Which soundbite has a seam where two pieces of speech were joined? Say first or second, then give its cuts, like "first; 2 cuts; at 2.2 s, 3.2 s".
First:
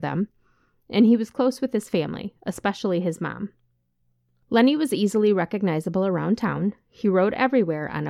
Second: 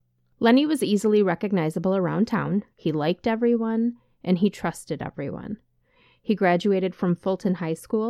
second; 1 cut; at 2.7 s